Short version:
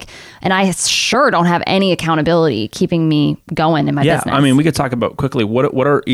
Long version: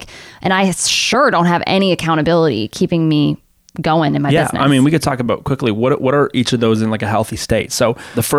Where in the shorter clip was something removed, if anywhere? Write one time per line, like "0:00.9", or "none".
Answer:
0:03.4